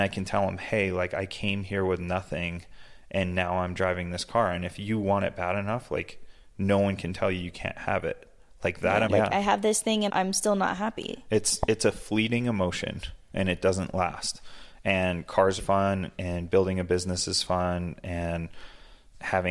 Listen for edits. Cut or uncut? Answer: cut